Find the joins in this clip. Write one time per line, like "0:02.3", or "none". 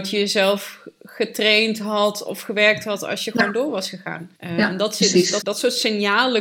0:04.3
0:05.4